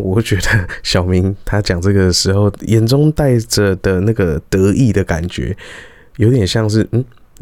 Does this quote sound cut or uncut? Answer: uncut